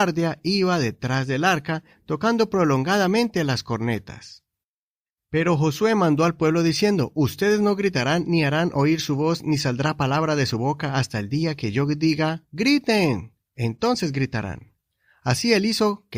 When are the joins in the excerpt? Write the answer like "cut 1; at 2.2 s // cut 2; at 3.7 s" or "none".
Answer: none